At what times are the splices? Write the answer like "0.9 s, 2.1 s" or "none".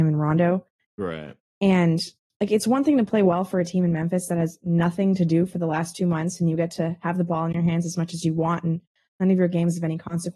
none